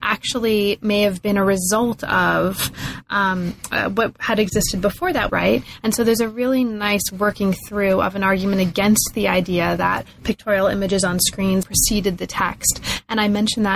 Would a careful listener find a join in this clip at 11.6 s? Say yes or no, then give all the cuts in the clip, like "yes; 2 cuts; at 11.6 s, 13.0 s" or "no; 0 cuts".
yes; 2 cuts; at 5.3 s, 11.6 s